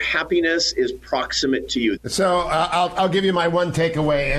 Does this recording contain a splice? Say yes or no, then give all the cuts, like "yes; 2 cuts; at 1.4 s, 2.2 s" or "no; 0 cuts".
yes; 1 cut; at 2.0 s